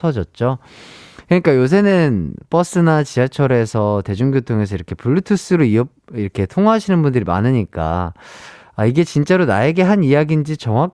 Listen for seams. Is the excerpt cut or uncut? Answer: uncut